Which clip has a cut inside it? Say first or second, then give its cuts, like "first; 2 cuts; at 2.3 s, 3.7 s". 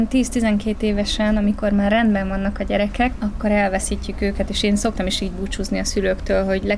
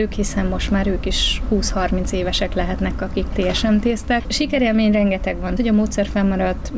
second; 2 cuts; at 4.2 s, 5.6 s